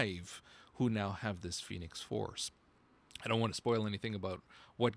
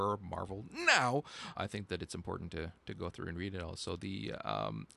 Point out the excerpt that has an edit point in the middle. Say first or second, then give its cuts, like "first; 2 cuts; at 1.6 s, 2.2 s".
second; 1 cut; at 1.6 s